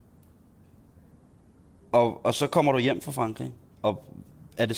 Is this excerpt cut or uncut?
uncut